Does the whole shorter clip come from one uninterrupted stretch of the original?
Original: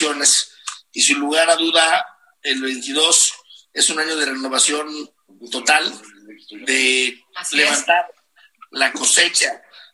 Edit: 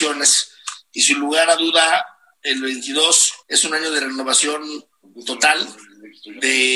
no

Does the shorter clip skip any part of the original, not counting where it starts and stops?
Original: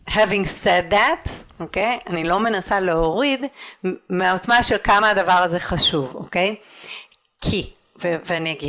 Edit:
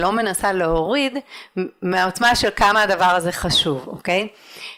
no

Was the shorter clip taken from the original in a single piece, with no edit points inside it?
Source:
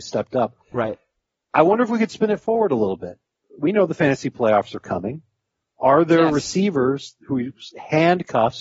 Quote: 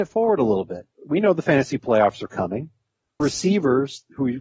no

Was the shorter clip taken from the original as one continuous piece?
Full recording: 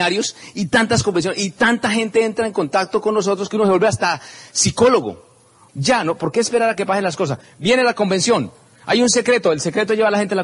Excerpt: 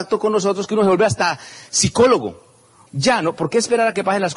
yes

